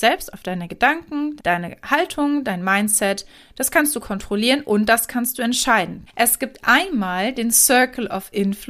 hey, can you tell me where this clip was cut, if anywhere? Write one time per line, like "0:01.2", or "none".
0:01.4
0:06.1